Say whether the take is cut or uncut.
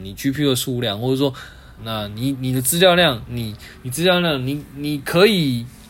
cut